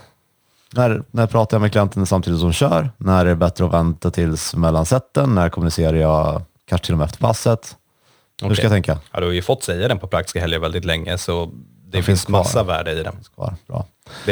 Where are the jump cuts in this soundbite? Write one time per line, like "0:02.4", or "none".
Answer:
0:09.0